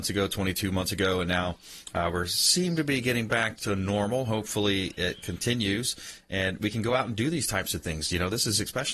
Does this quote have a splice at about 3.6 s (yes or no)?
yes